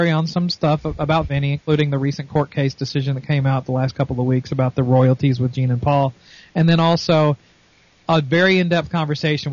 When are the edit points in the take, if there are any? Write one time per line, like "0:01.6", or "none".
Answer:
none